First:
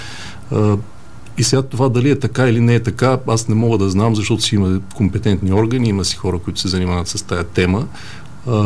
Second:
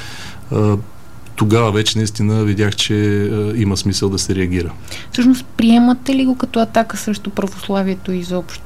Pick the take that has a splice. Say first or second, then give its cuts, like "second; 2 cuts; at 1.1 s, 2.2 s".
first; 1 cut; at 1.4 s